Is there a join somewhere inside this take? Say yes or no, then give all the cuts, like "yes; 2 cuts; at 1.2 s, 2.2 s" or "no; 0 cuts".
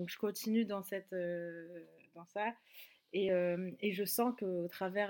no; 0 cuts